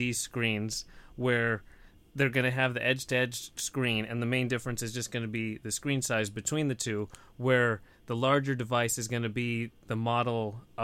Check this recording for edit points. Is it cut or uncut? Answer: uncut